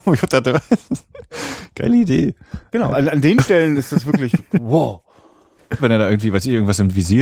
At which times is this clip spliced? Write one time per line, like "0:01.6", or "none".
0:02.9
0:05.8